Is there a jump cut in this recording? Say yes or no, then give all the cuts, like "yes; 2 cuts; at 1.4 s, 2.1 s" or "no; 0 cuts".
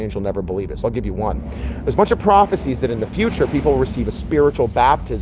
no; 0 cuts